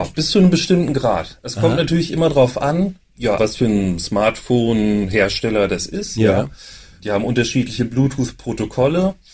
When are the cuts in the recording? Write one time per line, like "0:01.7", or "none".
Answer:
0:03.4